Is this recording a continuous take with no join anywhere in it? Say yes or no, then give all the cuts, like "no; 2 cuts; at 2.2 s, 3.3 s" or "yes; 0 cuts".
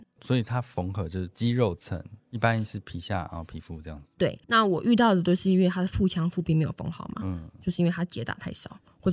yes; 0 cuts